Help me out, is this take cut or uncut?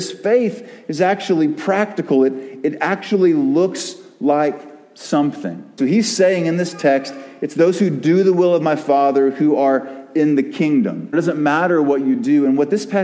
cut